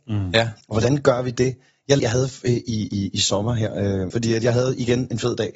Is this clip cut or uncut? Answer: cut